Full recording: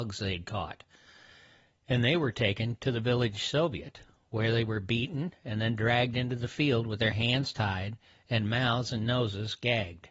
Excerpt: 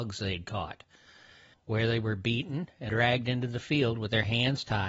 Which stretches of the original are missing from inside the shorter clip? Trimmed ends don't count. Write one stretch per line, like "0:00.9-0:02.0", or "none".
0:01.5-0:04.2
0:05.5-0:05.8